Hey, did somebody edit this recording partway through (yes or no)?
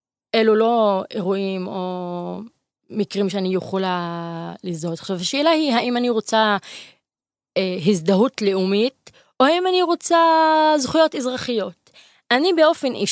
no